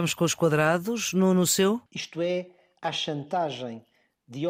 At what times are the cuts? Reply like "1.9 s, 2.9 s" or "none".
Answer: 1.9 s